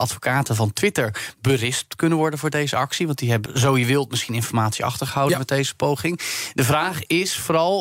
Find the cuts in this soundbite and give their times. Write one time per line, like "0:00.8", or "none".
0:03.5